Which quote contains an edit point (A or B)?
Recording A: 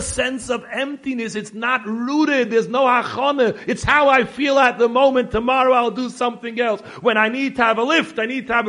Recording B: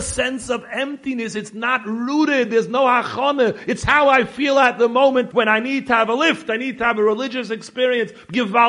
B